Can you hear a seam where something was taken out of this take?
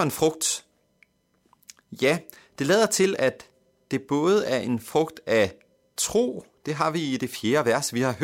no; 0 cuts

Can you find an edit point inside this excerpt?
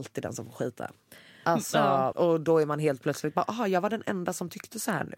yes; 1 cut; at 2.1 s

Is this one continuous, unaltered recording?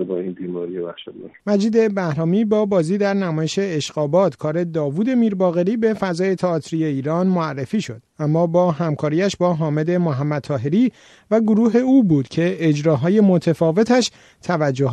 no; 1 cut; at 1.4 s

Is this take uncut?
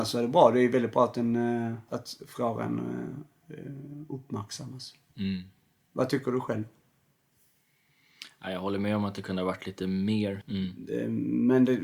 no; 2 cuts; at 1.9 s, 10.4 s

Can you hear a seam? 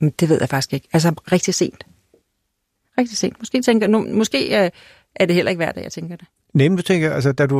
no; 0 cuts

